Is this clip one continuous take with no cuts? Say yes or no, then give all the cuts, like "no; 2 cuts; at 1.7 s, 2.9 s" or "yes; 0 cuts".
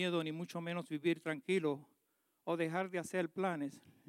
yes; 0 cuts